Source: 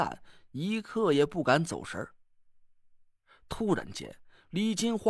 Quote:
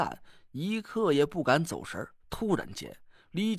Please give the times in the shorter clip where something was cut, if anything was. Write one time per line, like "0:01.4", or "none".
0:02.2